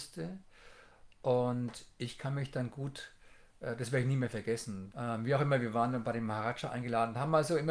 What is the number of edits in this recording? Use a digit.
1